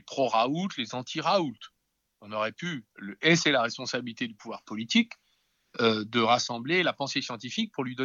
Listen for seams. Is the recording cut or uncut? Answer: uncut